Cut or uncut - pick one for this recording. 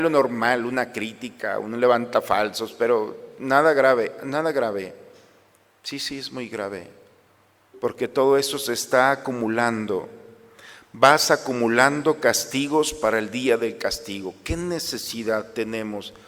uncut